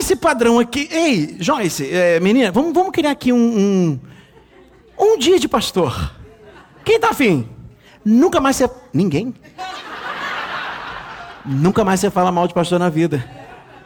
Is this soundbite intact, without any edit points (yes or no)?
yes